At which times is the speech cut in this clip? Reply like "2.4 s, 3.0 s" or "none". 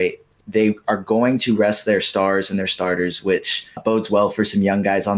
3.8 s